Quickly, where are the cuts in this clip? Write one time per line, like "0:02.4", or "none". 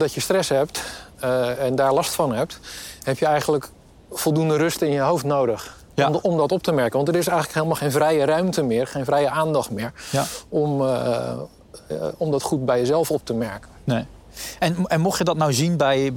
none